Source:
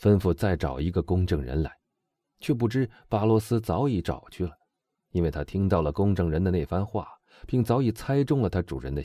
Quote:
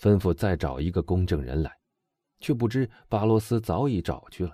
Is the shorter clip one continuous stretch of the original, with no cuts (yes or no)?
yes